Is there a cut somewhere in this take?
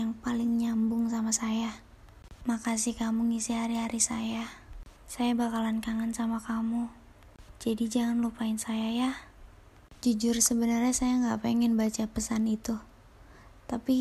no; 0 cuts

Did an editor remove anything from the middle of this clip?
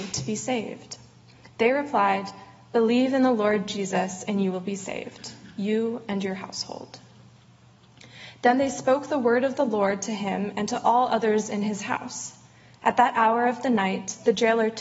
no; 0 cuts

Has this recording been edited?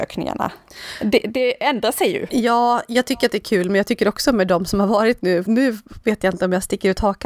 no; 0 cuts

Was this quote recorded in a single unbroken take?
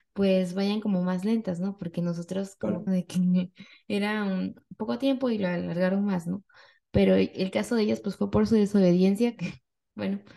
no; 1 cut; at 2.9 s

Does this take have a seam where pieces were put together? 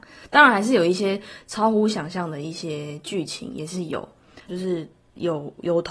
yes; 1 cut; at 4.5 s

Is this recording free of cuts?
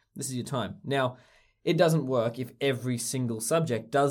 yes; 0 cuts

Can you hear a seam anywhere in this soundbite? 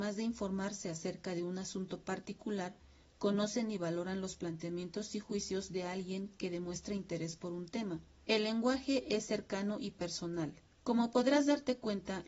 yes; 2 cuts; at 8.2 s, 10.8 s

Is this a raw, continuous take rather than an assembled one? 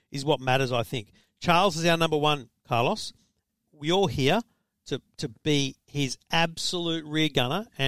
yes; 0 cuts

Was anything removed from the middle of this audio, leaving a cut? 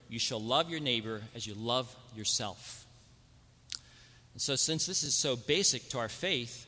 no; 0 cuts

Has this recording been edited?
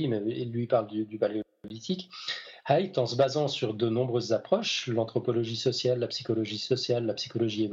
yes; 1 cut; at 2.6 s

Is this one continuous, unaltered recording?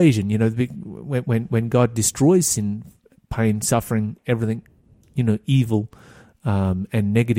yes; 0 cuts

